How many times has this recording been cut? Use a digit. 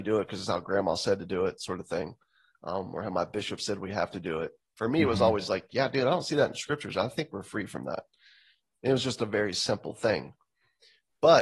0